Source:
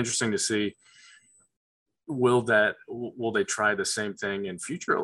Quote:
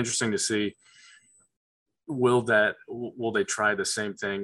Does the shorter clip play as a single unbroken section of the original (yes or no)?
yes